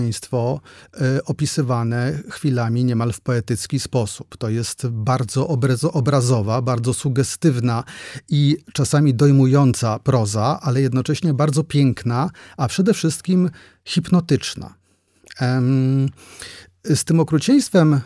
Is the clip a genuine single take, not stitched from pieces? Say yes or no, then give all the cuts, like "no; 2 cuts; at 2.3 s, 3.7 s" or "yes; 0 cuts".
yes; 0 cuts